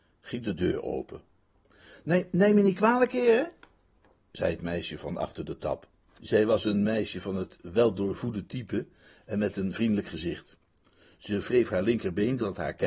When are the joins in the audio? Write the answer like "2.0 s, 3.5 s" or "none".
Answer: 6.2 s